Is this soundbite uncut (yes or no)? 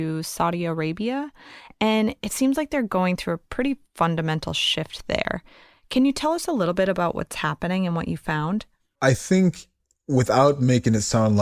yes